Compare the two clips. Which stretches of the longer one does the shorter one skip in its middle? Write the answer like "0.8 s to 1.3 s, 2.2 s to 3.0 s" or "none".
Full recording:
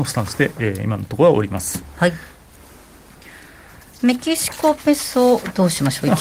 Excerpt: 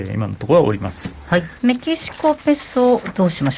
2.3 s to 4.0 s